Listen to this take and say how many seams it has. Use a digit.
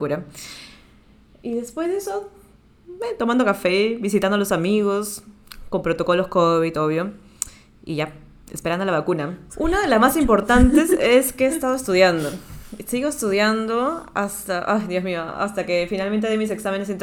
1